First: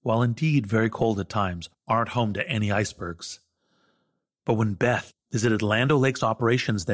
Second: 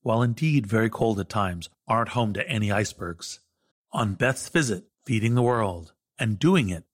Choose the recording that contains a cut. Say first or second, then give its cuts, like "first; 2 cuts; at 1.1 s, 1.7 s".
second; 2 cuts; at 3.7 s, 4.9 s